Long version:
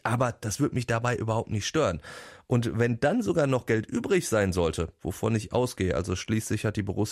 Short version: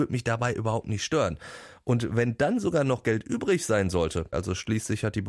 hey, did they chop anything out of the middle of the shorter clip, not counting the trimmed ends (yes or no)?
yes